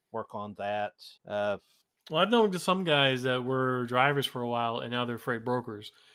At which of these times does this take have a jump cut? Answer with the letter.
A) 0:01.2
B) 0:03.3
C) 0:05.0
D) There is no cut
A